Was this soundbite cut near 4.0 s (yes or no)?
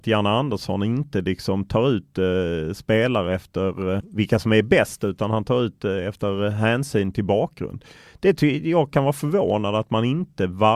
yes